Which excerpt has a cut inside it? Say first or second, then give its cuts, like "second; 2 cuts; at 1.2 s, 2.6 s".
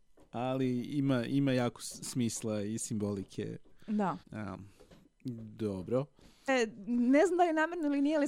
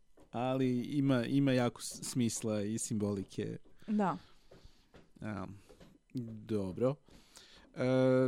first; 2 cuts; at 4.2 s, 6.5 s